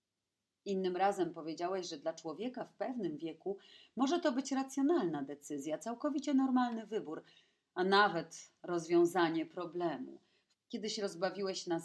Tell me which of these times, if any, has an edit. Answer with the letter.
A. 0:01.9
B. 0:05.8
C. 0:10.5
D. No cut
C